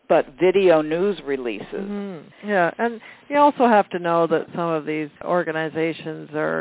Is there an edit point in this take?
yes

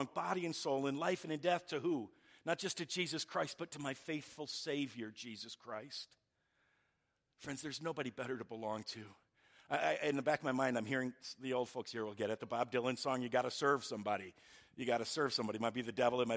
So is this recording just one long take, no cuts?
yes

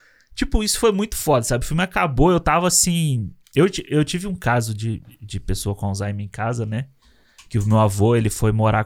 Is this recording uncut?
yes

